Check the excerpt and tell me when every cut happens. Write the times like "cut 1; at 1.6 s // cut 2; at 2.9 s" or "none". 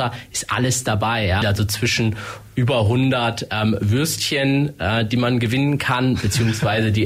cut 1; at 1.4 s